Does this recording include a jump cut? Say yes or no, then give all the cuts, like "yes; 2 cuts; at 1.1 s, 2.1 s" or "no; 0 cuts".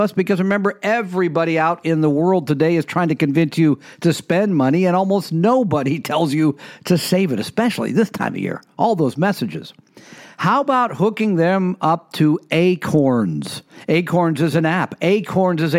no; 0 cuts